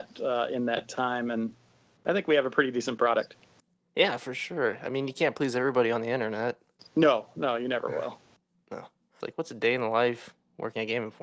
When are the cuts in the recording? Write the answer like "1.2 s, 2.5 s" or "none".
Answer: 9.2 s